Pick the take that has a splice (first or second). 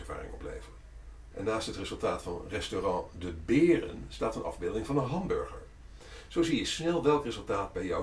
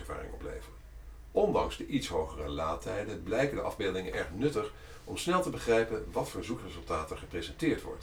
first